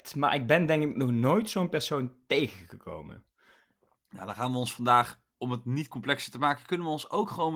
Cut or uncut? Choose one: uncut